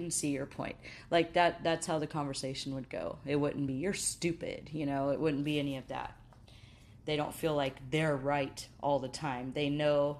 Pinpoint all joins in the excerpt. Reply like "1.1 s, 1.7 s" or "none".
none